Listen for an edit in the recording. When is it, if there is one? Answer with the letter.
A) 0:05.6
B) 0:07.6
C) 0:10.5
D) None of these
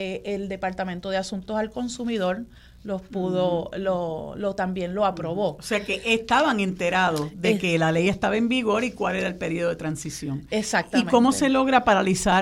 D